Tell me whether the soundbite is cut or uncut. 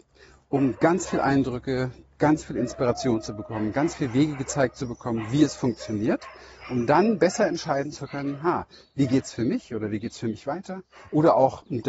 uncut